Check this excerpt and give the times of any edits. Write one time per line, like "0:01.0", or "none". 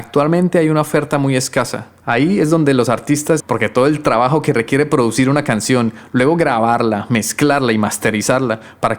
0:02.0
0:03.4